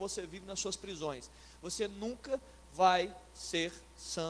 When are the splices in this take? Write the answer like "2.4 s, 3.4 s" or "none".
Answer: none